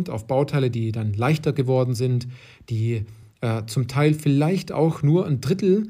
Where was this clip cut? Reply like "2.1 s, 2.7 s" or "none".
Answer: none